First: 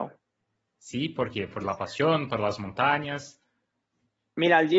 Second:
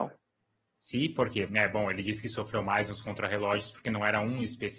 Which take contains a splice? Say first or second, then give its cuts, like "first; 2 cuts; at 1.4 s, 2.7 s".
second; 1 cut; at 1.5 s